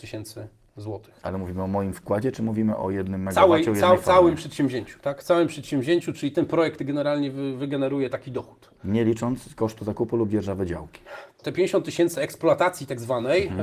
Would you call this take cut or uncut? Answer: cut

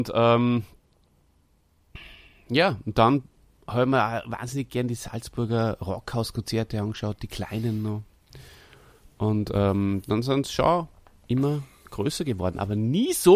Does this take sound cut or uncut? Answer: uncut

